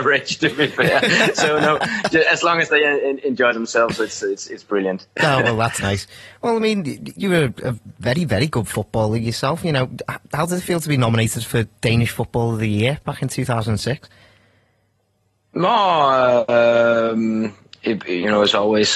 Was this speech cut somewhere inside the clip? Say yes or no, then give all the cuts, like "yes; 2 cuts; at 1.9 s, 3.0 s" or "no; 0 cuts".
no; 0 cuts